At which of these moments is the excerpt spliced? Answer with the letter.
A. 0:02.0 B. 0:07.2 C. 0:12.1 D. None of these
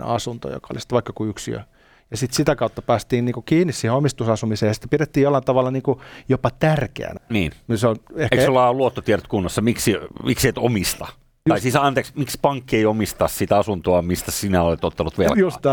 B